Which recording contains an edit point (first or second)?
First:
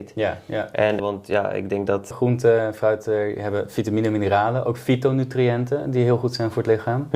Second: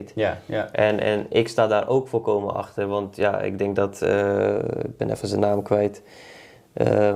first